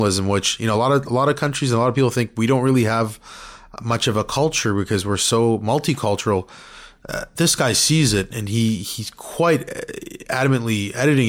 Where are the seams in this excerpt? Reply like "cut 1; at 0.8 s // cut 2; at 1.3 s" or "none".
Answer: cut 1; at 8.3 s